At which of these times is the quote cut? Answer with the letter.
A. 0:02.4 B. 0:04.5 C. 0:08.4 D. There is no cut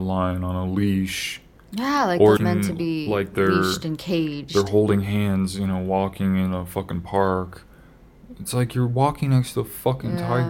A